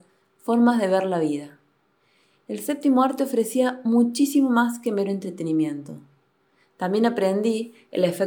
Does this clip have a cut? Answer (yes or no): no